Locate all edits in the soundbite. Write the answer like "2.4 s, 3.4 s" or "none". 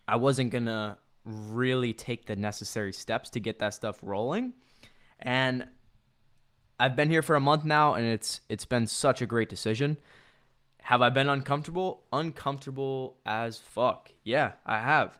none